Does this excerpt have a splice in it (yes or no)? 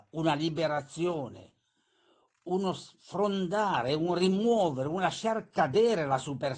no